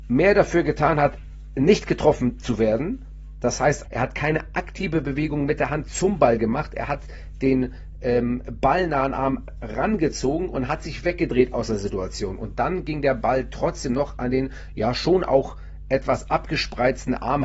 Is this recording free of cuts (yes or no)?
no